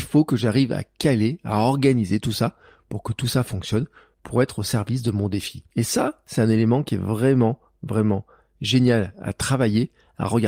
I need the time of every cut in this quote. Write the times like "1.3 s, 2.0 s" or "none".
5.7 s

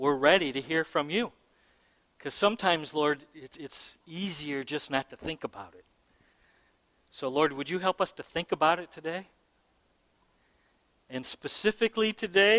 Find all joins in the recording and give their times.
none

